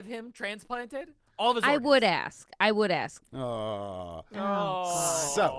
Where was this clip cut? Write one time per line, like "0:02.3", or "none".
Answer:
0:03.2